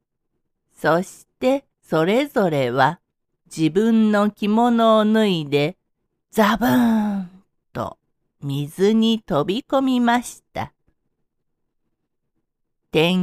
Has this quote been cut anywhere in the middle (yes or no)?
yes